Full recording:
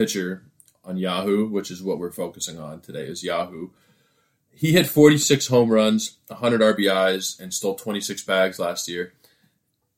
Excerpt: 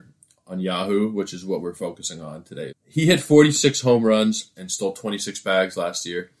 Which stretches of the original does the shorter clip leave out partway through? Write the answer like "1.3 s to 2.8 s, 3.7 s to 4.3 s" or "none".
3.1 s to 4.4 s, 6.2 s to 7.4 s